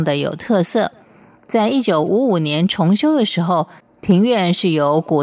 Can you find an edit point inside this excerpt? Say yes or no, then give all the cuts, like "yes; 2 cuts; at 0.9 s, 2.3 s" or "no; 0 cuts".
no; 0 cuts